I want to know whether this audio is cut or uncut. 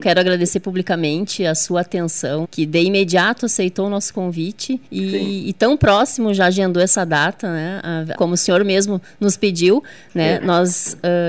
cut